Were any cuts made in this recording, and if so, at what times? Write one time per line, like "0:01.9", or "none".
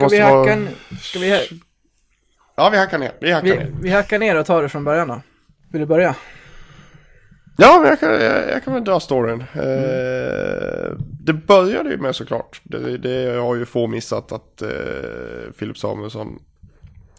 none